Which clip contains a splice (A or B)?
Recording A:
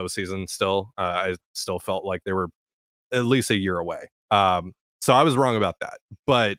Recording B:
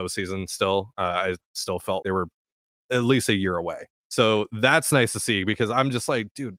B